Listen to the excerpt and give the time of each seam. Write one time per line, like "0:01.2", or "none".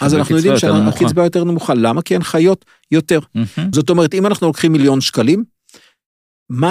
0:03.7